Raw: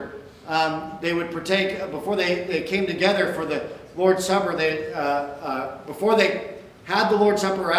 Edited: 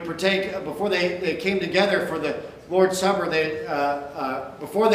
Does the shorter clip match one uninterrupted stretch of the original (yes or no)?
yes